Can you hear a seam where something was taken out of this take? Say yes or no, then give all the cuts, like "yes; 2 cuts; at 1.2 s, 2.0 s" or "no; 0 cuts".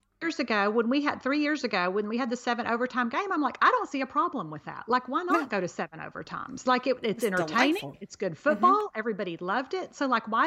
no; 0 cuts